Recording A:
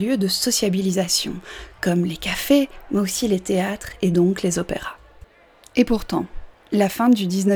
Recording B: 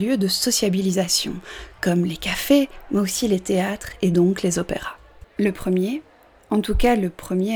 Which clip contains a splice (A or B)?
B